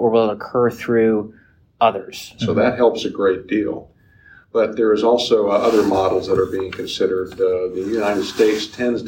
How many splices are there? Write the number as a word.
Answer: one